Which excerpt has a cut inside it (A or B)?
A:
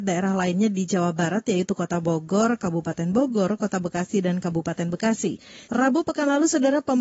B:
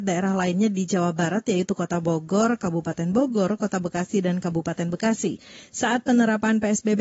A